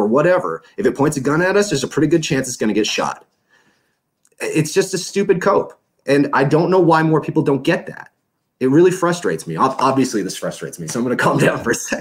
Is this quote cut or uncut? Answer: uncut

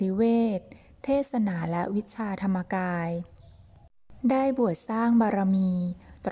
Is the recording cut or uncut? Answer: cut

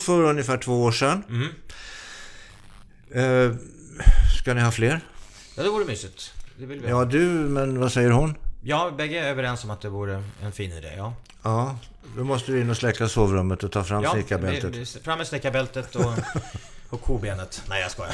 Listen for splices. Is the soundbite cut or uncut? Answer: uncut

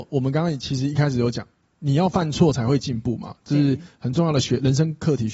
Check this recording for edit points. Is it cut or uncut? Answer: uncut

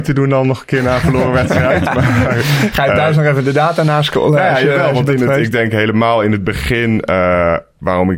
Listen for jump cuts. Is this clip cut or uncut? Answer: uncut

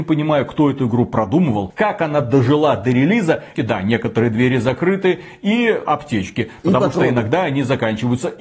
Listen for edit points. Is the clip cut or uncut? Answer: cut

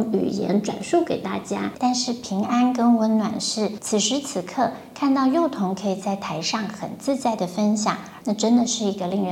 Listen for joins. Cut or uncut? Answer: cut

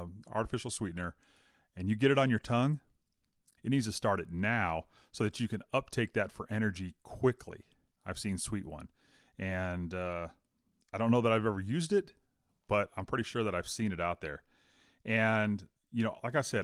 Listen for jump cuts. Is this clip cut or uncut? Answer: cut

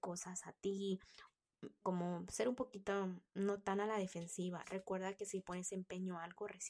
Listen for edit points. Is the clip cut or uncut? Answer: cut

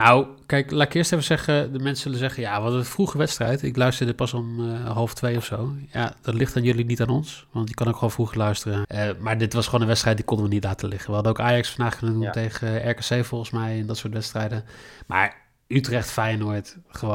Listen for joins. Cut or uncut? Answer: cut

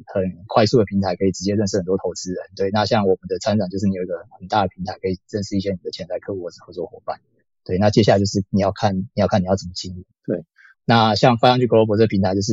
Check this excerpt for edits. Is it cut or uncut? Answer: cut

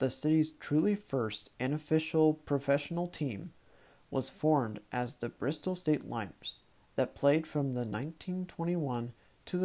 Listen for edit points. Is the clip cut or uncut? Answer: uncut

